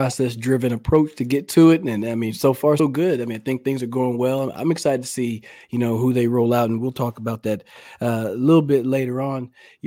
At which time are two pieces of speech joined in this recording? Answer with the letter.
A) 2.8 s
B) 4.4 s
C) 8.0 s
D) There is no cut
A